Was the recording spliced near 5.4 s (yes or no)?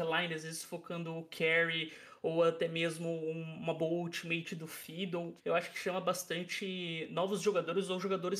yes